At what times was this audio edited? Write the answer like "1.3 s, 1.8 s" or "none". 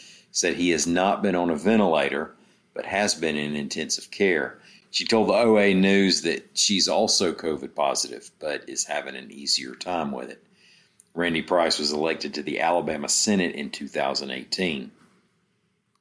none